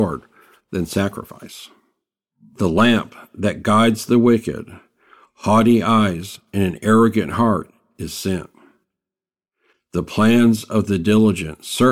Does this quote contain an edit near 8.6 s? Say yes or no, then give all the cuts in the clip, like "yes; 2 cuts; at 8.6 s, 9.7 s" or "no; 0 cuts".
no; 0 cuts